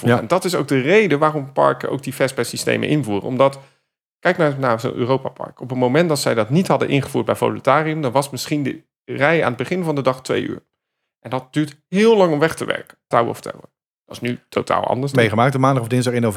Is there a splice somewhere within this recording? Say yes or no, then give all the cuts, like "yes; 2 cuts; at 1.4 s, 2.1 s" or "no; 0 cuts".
yes; 2 cuts; at 13.1 s, 15.1 s